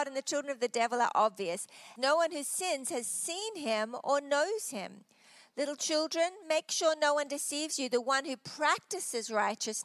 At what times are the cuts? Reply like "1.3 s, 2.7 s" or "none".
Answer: 2.0 s

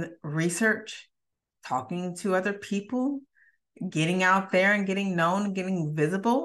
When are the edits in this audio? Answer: 3.9 s

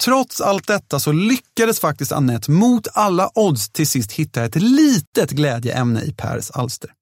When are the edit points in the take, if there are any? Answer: none

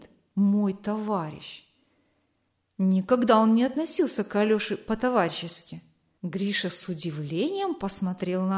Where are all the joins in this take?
6.2 s

